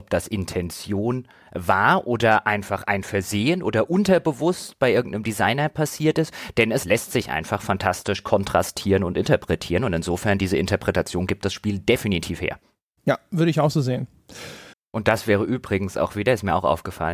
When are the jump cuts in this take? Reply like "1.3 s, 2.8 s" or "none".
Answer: 14.7 s